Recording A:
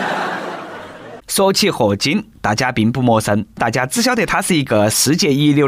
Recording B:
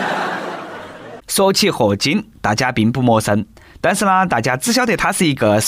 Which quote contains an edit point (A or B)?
A